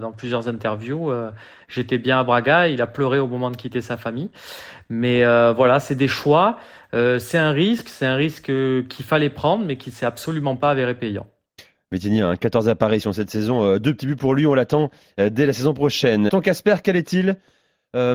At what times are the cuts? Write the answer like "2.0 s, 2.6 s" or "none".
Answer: 16.3 s